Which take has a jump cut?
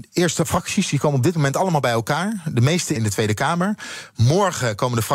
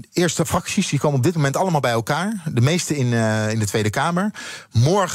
first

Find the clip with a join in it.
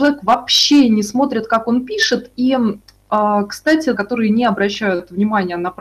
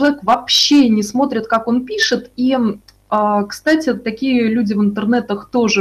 first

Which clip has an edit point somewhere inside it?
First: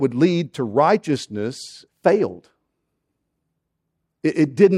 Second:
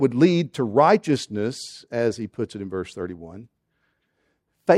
first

